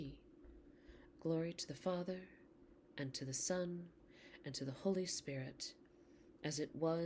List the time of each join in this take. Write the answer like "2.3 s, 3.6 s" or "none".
1.1 s